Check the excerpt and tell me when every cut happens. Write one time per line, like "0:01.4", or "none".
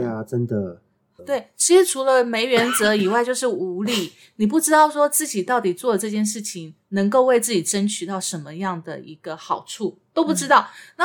0:01.2